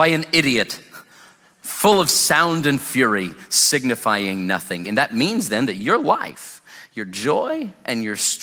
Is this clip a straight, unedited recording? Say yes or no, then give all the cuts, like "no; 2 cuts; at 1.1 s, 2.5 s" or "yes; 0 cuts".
no; 1 cut; at 4.8 s